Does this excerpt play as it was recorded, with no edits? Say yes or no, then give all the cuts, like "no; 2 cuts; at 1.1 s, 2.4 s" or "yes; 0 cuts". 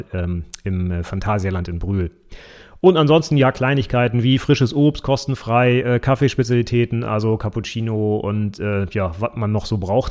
yes; 0 cuts